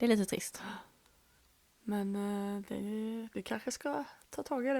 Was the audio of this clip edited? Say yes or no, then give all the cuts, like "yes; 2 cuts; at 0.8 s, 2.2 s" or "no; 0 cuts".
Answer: no; 0 cuts